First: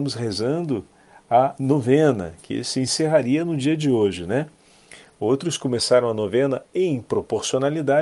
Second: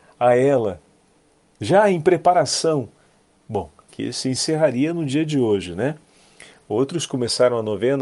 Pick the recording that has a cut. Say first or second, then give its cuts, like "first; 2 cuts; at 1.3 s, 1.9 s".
second; 1 cut; at 3.9 s